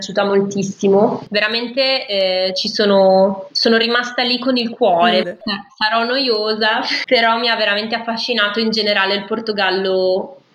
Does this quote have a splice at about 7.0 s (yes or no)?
yes